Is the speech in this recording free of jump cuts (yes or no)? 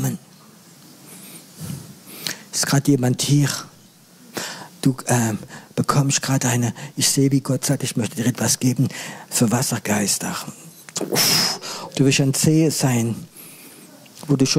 no